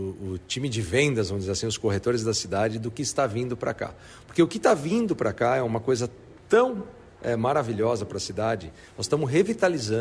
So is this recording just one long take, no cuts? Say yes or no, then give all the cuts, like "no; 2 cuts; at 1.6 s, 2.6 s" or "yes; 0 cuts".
yes; 0 cuts